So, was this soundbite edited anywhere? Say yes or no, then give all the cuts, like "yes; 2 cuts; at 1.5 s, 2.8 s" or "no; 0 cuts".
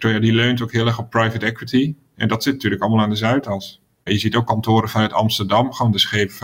yes; 1 cut; at 4.1 s